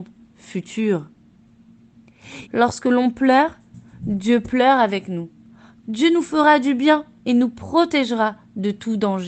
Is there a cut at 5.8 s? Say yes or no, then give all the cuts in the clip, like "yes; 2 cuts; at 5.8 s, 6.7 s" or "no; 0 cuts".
yes; 2 cuts; at 2.5 s, 5.8 s